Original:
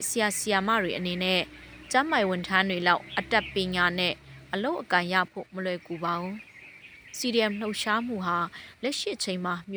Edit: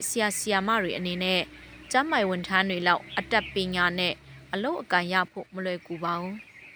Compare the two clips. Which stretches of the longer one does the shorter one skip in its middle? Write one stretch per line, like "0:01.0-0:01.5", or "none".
none